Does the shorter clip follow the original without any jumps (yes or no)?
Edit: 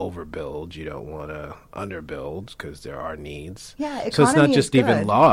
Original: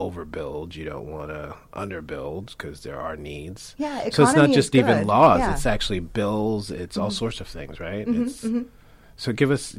yes